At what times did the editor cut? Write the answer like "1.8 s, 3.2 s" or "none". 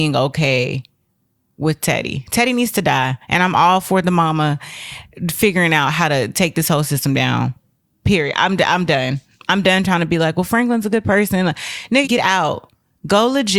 12.0 s